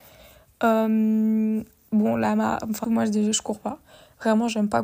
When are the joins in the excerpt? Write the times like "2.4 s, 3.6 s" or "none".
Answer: 2.8 s